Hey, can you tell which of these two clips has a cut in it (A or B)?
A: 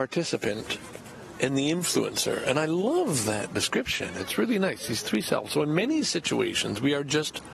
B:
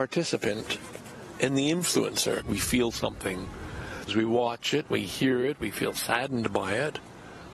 B